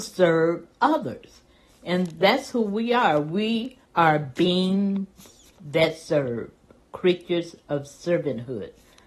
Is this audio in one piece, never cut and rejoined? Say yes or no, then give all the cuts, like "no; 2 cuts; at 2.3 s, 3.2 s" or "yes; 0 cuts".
no; 1 cut; at 3.9 s